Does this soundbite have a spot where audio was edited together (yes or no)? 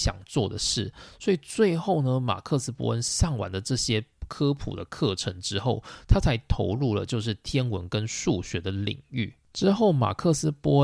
no